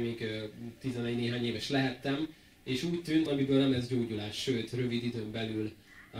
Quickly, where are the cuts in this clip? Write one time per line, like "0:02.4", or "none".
0:03.3